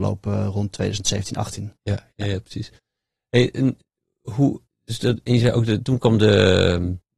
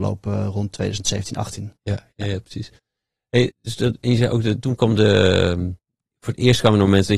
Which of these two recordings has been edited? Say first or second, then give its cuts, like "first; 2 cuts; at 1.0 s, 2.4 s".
second; 1 cut; at 3.5 s